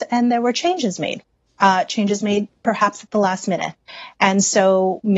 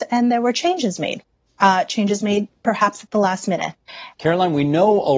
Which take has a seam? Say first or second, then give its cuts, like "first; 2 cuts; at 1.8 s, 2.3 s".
second; 1 cut; at 4.1 s